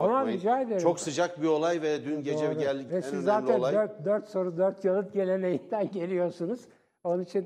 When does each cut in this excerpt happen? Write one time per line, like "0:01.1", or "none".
0:02.9